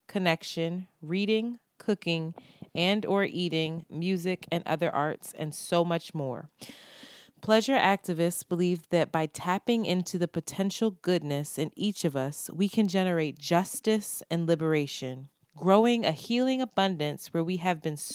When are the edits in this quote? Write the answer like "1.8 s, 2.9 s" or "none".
none